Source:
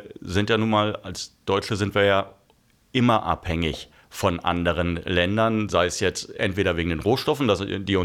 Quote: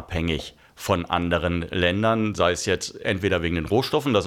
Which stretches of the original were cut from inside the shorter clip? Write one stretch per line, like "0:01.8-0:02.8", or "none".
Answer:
none

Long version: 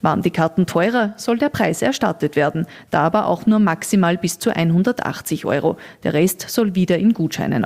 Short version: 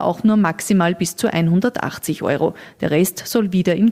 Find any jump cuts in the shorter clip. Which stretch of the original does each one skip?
none

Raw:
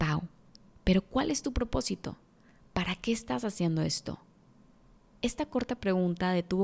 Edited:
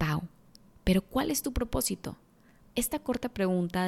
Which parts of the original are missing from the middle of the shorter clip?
0:02.7-0:05.1

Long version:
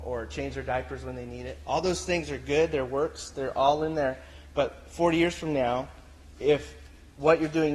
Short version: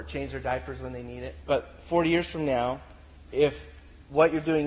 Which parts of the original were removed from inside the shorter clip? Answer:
0:01.6-0:04.5

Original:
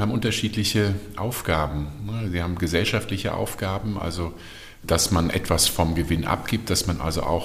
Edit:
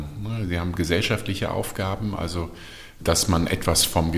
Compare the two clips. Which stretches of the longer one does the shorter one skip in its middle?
none

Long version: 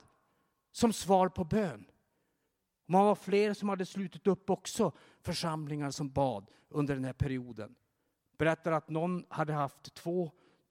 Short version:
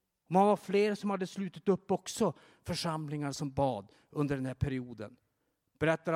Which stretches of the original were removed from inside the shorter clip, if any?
none

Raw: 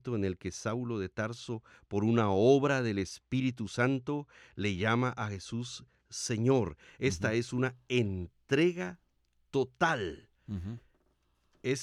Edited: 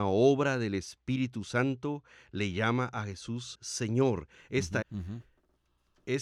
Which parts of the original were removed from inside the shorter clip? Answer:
0:05.8-0:06.0
0:07.3-0:10.4

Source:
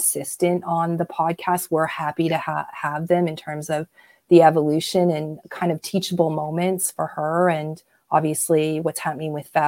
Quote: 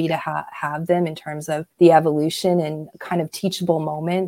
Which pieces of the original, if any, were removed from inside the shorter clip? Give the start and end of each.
0:03.9-0:04.2

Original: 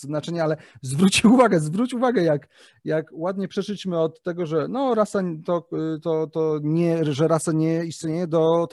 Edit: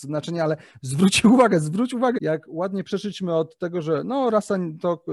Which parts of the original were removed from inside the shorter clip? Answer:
0:02.1-0:02.8

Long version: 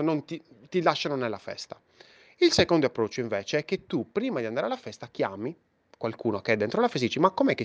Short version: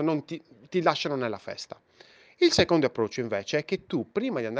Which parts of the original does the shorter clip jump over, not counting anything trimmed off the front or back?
none

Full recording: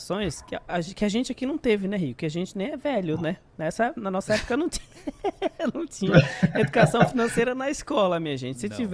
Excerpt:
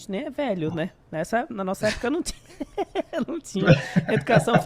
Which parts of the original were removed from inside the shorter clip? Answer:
none

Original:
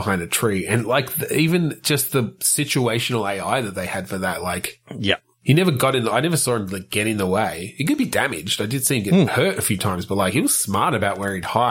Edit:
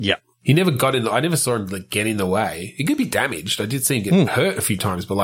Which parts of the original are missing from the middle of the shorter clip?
none

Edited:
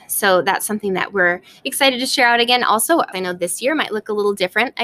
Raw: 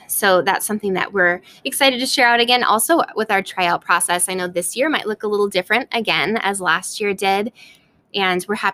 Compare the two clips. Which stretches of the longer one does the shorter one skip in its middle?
0:03.1-0:04.3

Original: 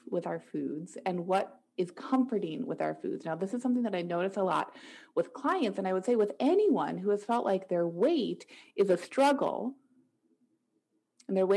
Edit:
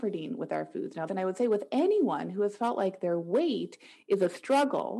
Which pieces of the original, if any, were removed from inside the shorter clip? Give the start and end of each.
0:03.4-0:05.7

